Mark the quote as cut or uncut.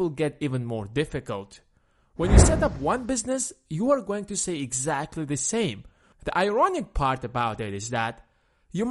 cut